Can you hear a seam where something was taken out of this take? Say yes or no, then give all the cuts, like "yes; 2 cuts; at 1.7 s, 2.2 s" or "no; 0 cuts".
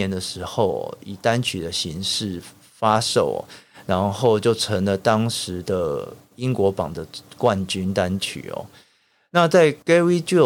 no; 0 cuts